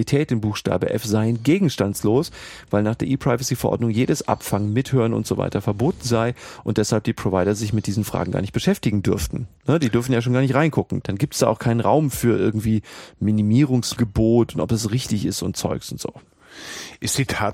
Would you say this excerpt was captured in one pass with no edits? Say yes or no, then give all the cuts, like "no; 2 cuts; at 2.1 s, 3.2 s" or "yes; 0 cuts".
yes; 0 cuts